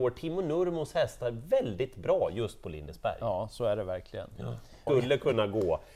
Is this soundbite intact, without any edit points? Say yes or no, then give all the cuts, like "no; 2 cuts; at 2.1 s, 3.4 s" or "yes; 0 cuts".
no; 1 cut; at 4.9 s